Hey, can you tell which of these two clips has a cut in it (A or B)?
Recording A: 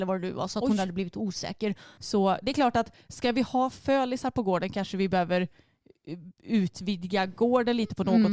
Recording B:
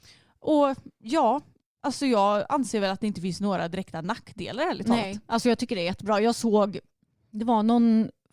A